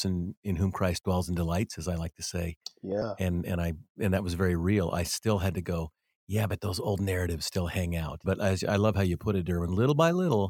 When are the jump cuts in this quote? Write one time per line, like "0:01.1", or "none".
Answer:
0:08.2